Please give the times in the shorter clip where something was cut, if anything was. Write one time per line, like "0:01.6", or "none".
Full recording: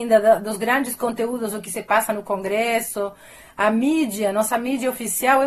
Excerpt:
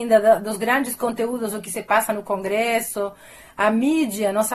none